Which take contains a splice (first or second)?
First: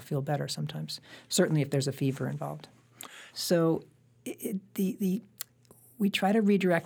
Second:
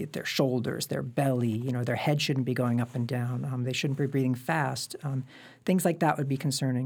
first